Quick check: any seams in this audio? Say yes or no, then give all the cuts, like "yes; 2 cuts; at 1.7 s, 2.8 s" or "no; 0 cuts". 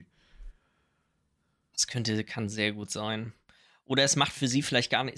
no; 0 cuts